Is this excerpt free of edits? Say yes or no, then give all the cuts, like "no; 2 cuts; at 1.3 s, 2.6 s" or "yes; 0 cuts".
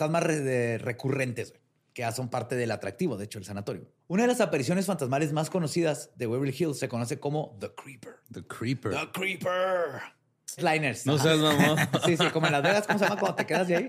no; 3 cuts; at 4.0 s, 8.2 s, 10.6 s